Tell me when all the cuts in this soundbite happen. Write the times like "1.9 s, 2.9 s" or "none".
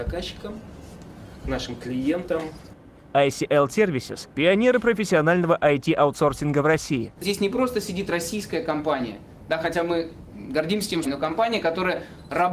7.2 s, 11.0 s